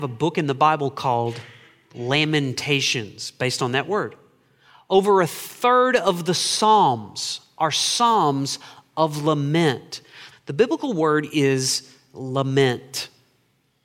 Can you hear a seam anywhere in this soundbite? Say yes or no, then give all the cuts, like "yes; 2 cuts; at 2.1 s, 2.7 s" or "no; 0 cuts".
yes; 1 cut; at 10.3 s